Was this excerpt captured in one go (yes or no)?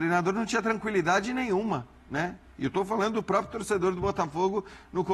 yes